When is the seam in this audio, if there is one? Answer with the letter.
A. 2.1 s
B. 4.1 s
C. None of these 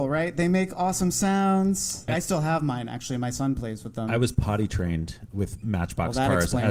A